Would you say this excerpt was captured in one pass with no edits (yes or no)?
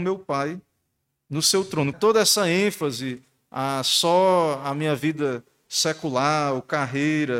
no